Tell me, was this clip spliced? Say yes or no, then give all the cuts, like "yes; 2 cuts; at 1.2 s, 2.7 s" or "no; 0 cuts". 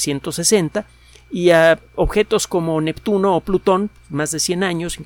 no; 0 cuts